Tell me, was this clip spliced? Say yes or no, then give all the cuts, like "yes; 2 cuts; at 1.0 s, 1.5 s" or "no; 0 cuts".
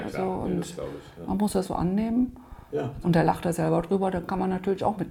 yes; 2 cuts; at 1.6 s, 3.0 s